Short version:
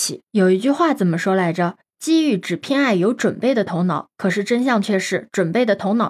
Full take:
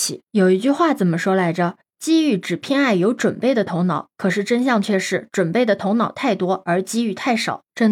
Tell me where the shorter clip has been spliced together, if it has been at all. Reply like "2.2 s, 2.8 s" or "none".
none